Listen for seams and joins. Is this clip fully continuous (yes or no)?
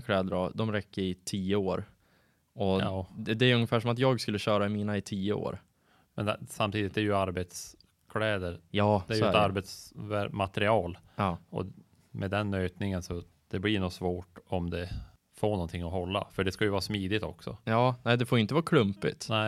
yes